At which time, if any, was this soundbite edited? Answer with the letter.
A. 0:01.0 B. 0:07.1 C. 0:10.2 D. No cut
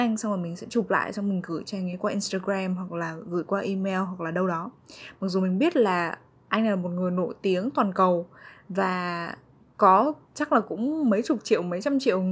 C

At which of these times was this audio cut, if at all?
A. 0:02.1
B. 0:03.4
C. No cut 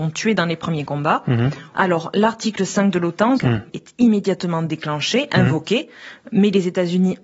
B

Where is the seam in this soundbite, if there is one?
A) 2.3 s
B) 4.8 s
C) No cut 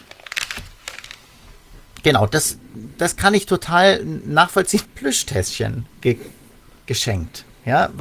B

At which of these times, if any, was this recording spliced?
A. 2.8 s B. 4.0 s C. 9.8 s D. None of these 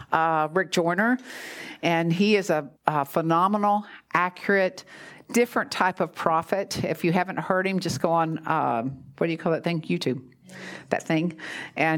A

